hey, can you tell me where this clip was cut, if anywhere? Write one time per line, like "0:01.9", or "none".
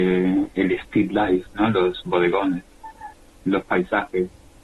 none